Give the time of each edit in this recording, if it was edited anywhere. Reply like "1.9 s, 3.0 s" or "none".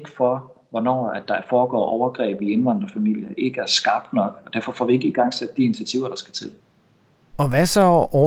none

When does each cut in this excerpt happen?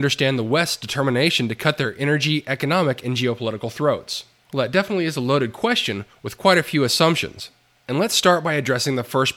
4.5 s

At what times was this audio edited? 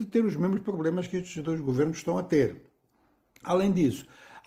none

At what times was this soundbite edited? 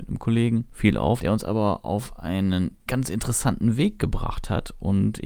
1.2 s

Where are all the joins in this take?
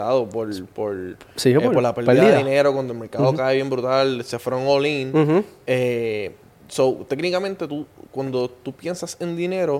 none

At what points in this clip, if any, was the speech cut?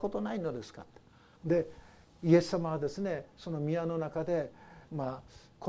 1.4 s

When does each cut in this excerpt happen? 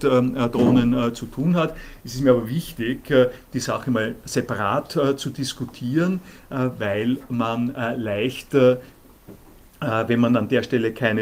none

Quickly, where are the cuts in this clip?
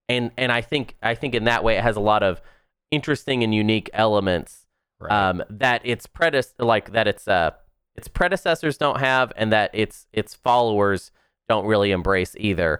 none

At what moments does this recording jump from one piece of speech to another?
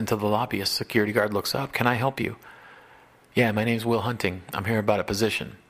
none

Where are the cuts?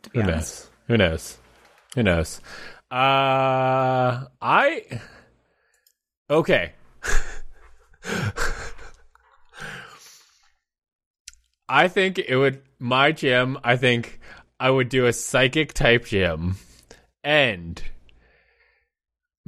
none

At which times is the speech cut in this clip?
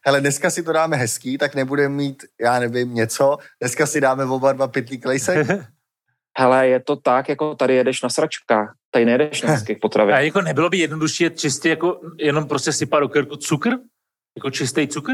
none

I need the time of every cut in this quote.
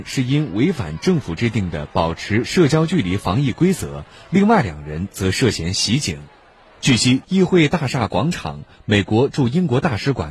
7.2 s

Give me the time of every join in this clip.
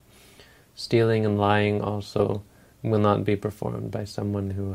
2.7 s

